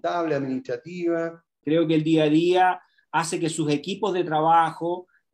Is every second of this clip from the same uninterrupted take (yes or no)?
no